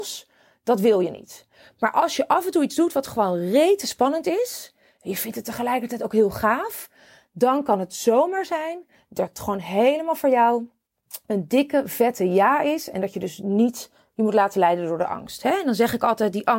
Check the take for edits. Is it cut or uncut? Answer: uncut